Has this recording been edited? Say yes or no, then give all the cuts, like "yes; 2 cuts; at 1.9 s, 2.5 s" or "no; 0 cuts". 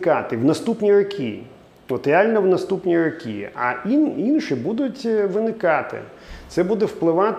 no; 0 cuts